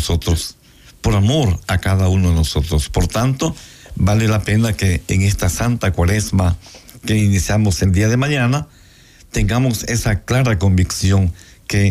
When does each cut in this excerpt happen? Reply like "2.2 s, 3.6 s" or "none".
none

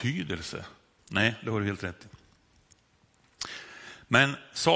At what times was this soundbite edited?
1.0 s

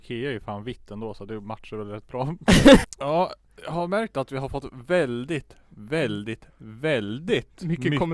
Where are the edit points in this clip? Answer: 2.8 s

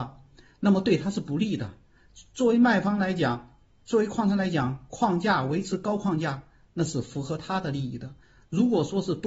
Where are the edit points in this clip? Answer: none

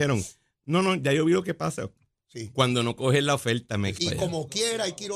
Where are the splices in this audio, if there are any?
4.0 s

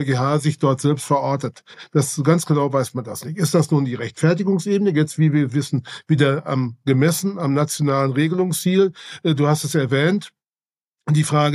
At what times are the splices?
none

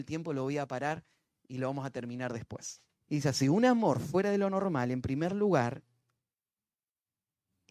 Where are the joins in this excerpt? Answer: 2.9 s

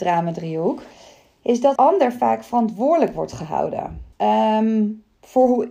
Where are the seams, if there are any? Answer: 1.8 s, 4.1 s

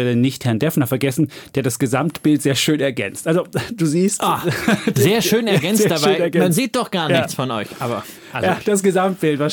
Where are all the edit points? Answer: none

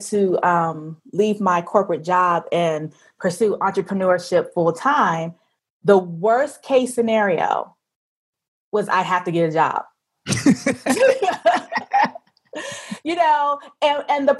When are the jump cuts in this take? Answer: none

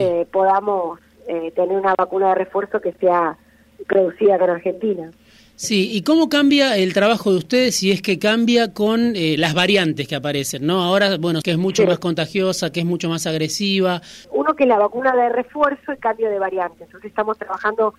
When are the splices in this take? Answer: 11.4 s, 14.2 s

